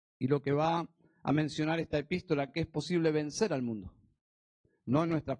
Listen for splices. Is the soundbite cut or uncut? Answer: uncut